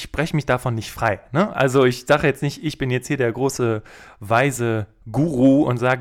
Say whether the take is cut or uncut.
uncut